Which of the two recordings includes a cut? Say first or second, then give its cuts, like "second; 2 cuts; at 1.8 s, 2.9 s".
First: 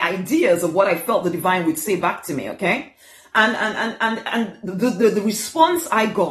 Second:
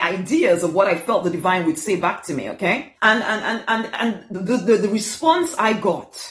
second; 1 cut; at 3.0 s